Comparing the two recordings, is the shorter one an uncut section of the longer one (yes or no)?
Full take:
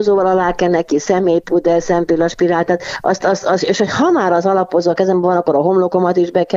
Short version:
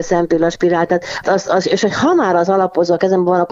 no